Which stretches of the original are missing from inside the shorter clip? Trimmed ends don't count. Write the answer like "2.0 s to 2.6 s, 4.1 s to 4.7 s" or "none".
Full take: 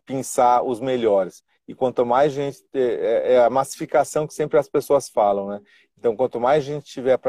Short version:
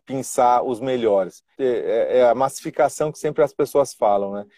1.5 s to 2.7 s

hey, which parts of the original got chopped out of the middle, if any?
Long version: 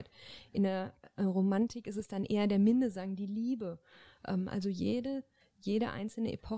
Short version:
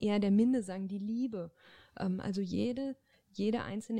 none

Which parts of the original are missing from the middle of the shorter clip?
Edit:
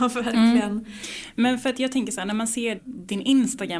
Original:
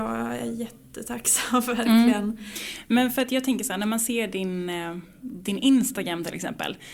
4.3 s to 5.1 s

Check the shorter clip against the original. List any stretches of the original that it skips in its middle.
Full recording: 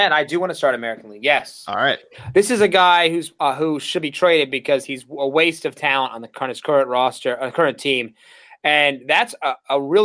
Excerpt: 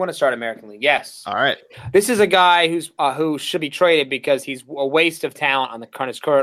none

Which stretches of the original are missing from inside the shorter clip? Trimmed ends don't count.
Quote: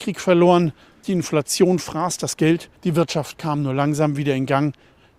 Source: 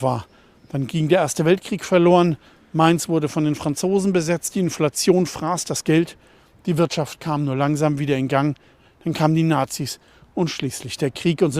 2.7 s to 4.5 s, 6.2 s to 6.6 s

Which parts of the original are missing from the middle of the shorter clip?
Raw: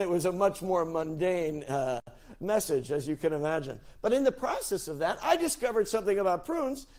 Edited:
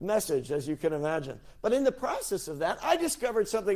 none

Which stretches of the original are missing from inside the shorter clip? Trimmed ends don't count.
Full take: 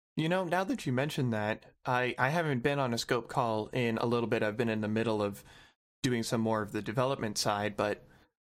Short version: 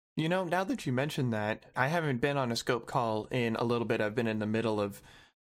1.7 s to 2.2 s

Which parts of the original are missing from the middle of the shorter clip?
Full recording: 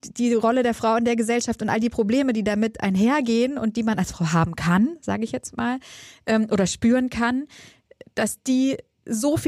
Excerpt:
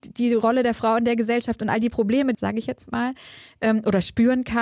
2.3 s to 5.0 s

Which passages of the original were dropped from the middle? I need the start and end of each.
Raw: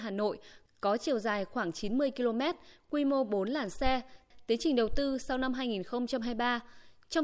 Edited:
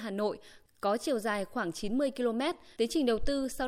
2.8 s to 4.5 s

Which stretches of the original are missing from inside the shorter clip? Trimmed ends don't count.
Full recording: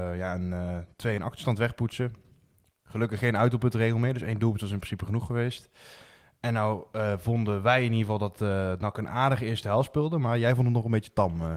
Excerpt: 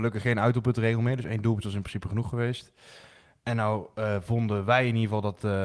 none

